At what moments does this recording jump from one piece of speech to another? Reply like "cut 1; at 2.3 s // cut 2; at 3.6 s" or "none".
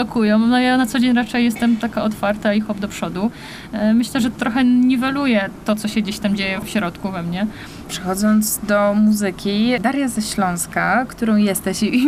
cut 1; at 7.8 s